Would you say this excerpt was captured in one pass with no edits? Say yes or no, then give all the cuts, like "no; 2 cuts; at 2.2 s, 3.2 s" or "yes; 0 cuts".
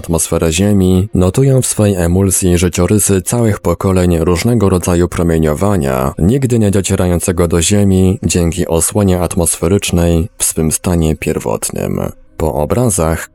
no; 1 cut; at 12.3 s